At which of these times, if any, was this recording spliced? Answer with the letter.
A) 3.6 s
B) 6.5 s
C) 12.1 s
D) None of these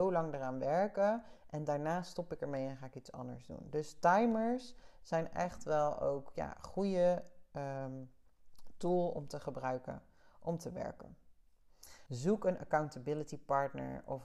C